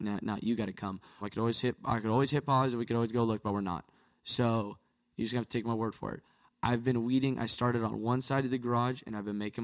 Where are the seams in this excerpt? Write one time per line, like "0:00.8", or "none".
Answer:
0:01.2